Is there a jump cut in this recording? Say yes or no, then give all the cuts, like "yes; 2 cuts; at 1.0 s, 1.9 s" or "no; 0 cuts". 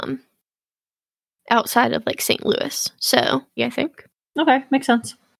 yes; 1 cut; at 3.6 s